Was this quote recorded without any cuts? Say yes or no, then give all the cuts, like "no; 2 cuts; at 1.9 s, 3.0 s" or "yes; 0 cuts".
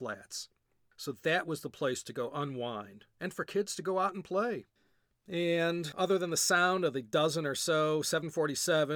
yes; 0 cuts